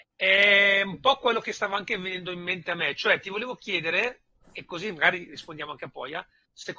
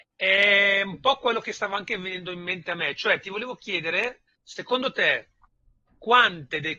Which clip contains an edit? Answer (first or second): second